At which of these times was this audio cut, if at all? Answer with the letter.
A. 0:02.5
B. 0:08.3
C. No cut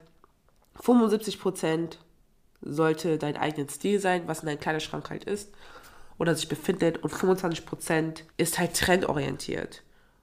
B